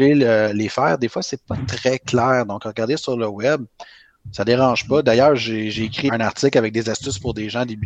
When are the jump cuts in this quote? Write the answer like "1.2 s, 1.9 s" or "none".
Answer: 6.1 s